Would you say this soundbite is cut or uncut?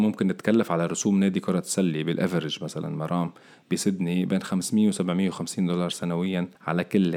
uncut